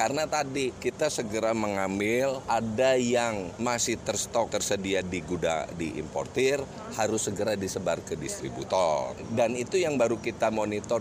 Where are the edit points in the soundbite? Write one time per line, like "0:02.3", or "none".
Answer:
none